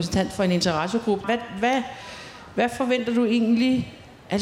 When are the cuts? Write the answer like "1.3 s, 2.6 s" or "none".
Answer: 1.2 s